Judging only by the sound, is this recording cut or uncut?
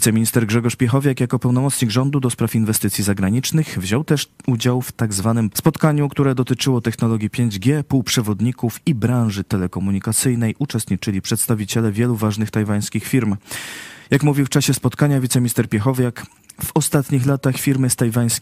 cut